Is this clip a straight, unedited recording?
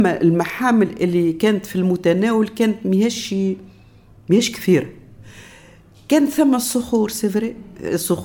yes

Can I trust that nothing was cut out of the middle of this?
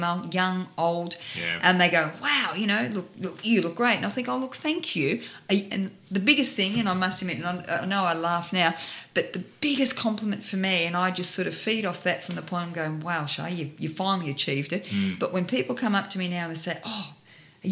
yes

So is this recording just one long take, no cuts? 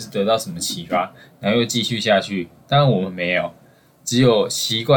yes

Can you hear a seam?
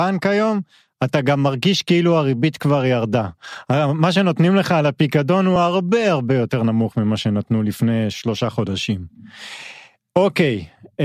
no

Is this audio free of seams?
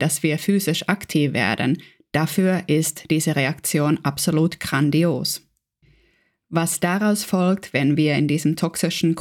no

